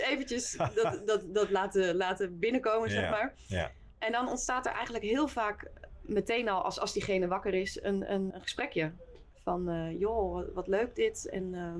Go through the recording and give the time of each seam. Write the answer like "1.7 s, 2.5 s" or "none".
8.3 s